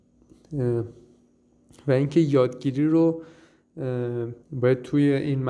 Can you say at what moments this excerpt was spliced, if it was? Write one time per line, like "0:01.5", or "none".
0:04.4